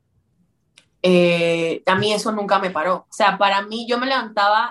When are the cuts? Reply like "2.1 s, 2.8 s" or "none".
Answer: 3.1 s